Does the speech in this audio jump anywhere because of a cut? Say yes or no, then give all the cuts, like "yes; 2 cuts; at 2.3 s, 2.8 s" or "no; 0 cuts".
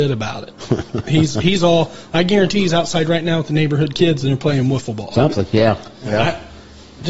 no; 0 cuts